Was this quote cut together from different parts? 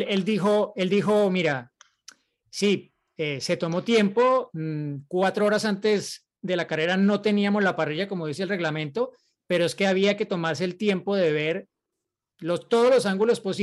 no; 0 cuts

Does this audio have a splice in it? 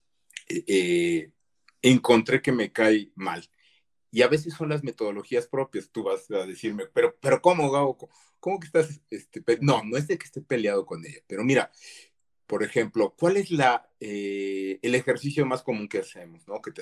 no; 0 cuts

